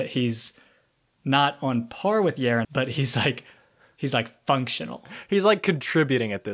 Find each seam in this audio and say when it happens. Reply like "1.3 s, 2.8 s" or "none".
2.6 s